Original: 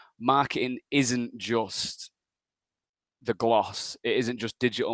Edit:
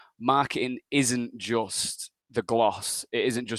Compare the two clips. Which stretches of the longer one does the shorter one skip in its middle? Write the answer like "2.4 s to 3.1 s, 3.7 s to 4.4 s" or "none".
2.2 s to 3.1 s